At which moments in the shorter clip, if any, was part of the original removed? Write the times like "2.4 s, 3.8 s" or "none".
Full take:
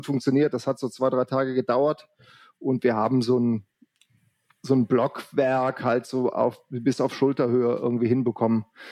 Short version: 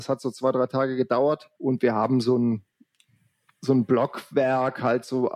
1.5 s